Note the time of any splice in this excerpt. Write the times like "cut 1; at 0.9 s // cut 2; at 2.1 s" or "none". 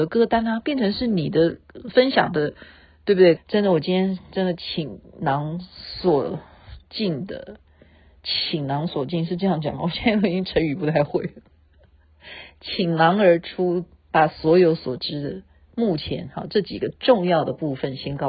cut 1; at 3.4 s

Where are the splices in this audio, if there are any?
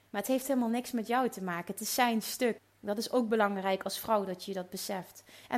cut 1; at 2.6 s

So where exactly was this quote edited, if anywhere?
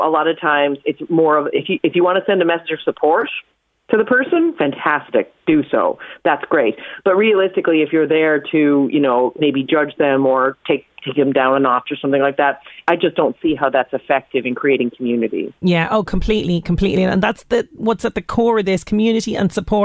none

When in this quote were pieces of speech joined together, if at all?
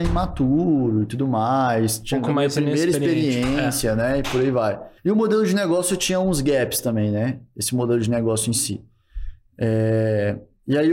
cut 1; at 5.0 s

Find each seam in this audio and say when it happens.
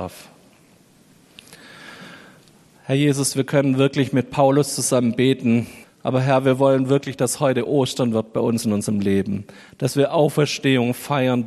cut 1; at 5.8 s

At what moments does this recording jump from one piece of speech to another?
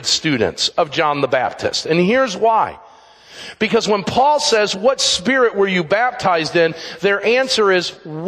none

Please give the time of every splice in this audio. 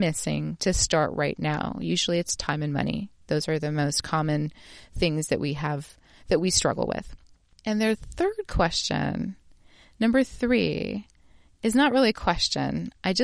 none

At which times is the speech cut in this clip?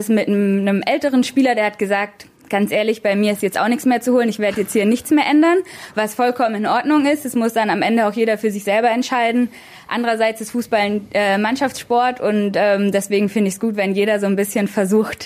none

